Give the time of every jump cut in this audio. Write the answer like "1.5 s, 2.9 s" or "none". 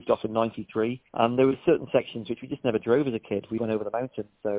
1.1 s, 3.6 s